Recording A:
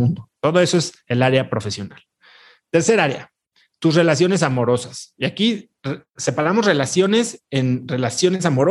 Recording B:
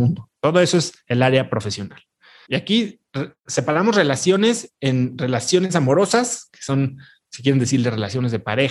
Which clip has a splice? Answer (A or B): B